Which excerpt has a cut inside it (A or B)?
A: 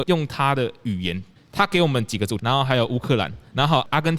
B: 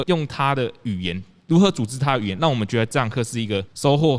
A